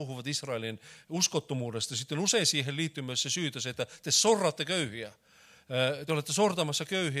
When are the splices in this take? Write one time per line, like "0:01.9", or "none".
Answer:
none